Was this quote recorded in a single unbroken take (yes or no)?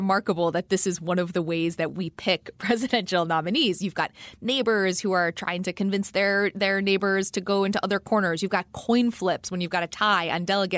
yes